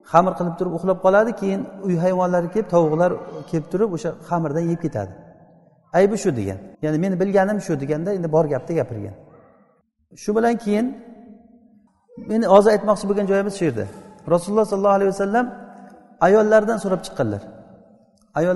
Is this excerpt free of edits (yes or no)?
no